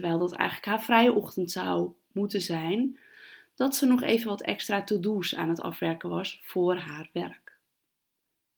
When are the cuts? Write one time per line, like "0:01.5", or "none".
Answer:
none